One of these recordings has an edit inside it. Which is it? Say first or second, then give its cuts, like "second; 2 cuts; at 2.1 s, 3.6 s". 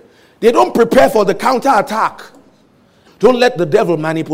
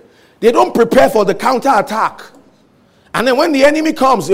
first; 1 cut; at 3.1 s